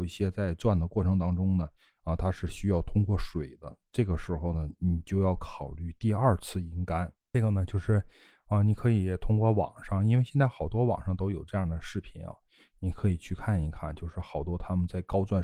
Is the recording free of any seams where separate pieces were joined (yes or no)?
yes